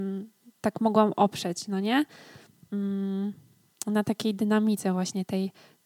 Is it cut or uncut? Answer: uncut